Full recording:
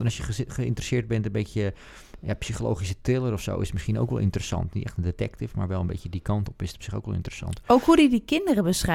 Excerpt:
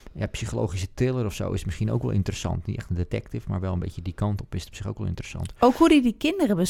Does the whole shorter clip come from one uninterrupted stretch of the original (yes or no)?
yes